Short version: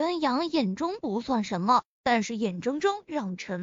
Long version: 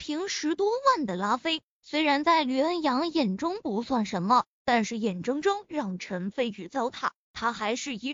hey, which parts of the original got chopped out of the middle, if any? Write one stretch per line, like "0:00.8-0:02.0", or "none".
none